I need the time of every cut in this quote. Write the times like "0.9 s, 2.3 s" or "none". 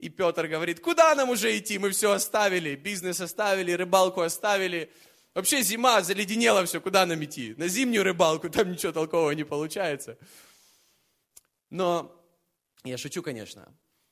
none